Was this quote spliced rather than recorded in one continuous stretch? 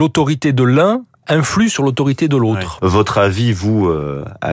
yes; 2 cuts; at 1.2 s, 2.8 s

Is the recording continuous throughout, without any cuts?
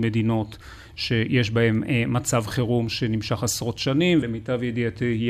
no; 1 cut; at 4.2 s

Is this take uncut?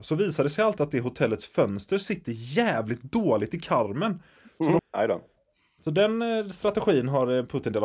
no; 1 cut; at 4.8 s

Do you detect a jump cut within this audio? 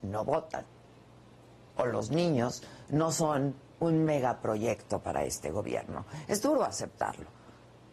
no; 0 cuts

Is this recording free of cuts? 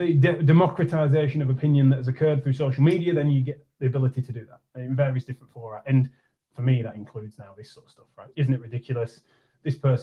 no; 1 cut; at 8.3 s

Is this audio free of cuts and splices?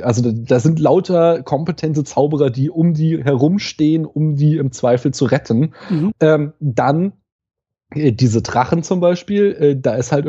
no; 1 cut; at 6.1 s

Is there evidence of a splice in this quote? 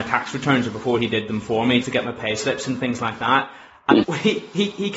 yes; 2 cuts; at 1.8 s, 4.0 s

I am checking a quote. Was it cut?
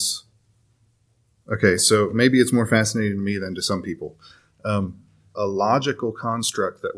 yes; 1 cut; at 5.3 s

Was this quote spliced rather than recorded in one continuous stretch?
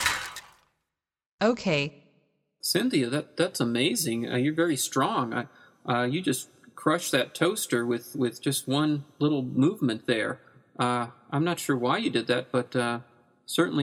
no; 0 cuts

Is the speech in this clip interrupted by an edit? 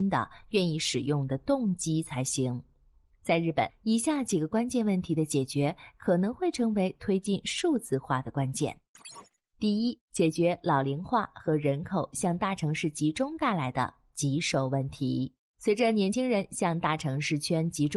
no; 0 cuts

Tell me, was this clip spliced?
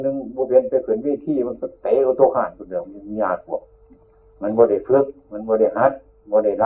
no; 0 cuts

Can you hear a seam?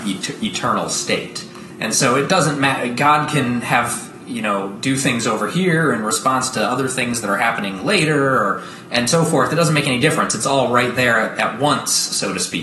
no; 0 cuts

